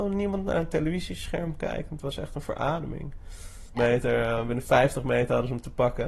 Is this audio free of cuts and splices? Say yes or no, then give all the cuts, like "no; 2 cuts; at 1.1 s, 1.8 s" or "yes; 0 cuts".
no; 1 cut; at 3.7 s